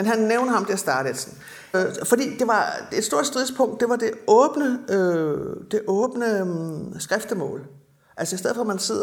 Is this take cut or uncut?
cut